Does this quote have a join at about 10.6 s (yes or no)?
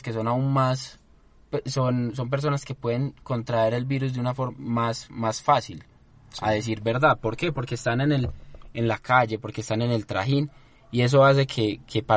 no